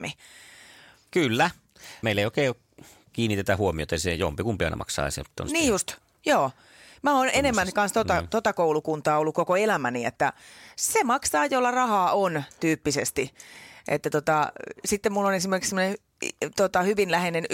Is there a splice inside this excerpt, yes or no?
yes